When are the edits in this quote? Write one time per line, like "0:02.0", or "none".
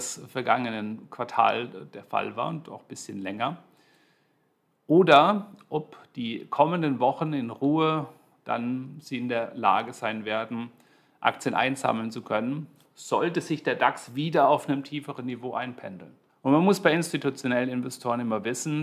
0:16.3